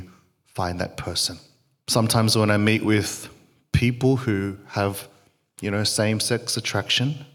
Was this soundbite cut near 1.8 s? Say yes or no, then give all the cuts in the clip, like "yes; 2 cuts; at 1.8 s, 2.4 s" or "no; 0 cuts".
yes; 1 cut; at 1.8 s